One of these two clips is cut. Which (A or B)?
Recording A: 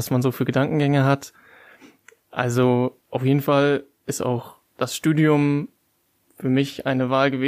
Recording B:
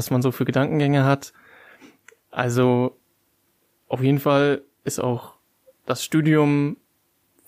A